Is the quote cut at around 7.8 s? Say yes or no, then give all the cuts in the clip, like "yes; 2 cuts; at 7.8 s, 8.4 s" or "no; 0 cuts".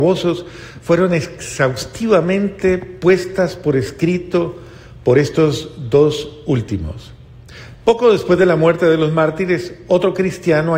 no; 0 cuts